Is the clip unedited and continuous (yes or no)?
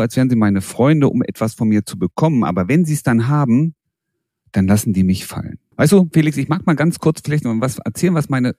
no